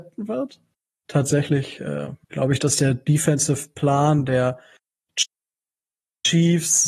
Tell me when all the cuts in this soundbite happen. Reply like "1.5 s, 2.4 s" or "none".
2.2 s